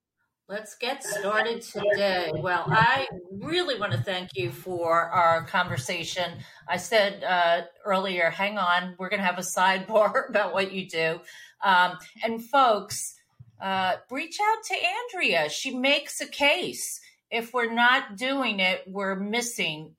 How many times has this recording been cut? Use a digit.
1